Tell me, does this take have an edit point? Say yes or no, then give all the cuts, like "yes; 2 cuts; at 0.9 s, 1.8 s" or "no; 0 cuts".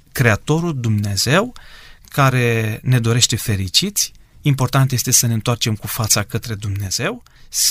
no; 0 cuts